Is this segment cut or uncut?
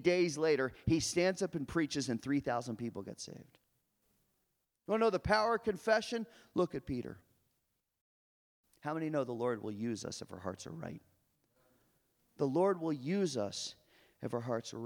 uncut